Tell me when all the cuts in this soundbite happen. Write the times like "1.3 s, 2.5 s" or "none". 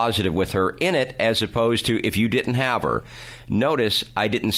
none